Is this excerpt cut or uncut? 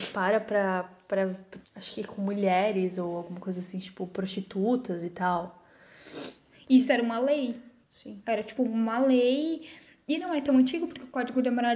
cut